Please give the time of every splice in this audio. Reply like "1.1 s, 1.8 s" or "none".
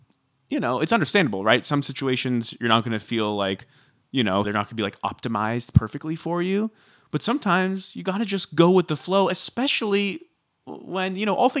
4.4 s